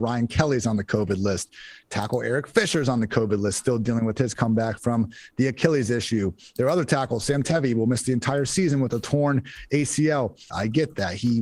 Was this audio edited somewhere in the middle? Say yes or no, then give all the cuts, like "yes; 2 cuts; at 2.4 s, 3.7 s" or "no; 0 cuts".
yes; 1 cut; at 10.5 s